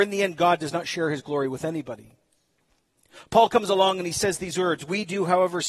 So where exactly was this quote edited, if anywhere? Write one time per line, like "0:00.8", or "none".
none